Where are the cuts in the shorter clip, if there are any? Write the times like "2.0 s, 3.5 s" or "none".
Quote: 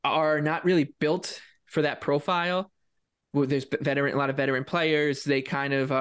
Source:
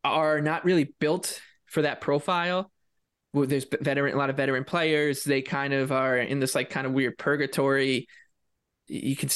none